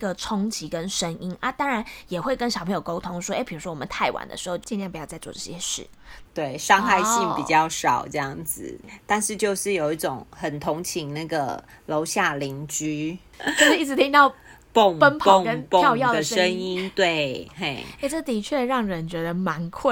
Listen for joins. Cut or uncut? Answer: cut